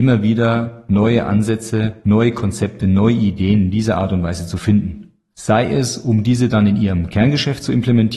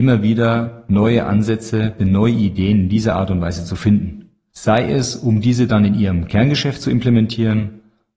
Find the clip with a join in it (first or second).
second